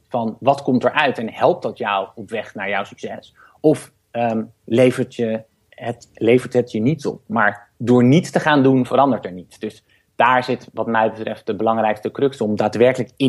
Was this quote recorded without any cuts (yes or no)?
yes